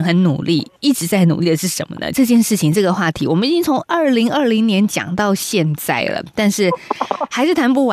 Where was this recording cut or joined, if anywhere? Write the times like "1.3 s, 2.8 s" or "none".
2.1 s